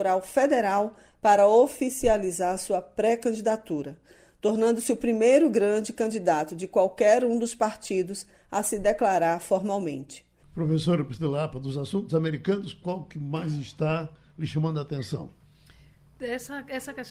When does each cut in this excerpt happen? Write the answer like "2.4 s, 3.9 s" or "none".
10.4 s

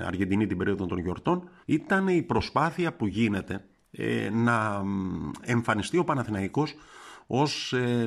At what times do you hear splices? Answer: 1.6 s

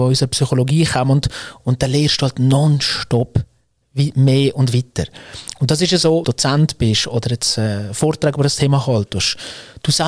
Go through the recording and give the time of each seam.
6.2 s

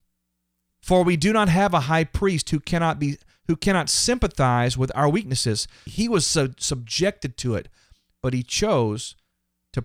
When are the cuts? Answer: 5.9 s

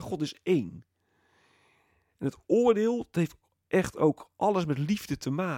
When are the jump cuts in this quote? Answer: none

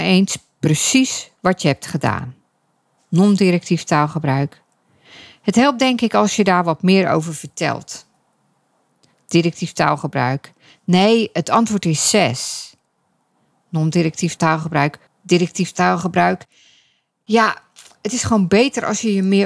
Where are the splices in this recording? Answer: 15.1 s

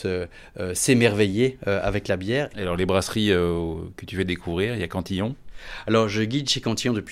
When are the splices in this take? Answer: 2.5 s

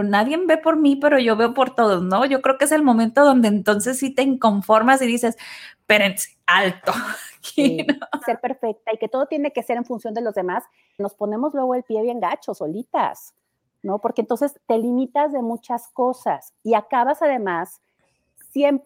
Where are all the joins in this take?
8.2 s, 11.0 s

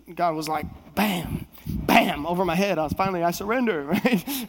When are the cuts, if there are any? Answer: none

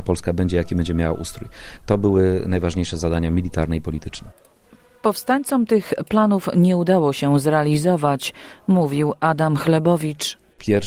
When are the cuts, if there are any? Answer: none

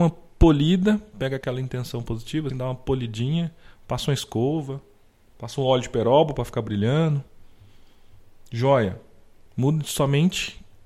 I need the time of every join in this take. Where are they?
2.5 s, 9.5 s

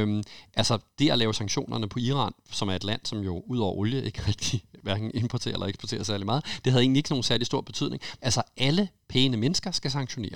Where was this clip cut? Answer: 8.2 s

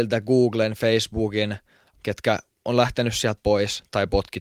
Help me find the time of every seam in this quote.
1.9 s

